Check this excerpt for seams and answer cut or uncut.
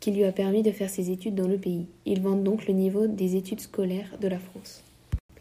uncut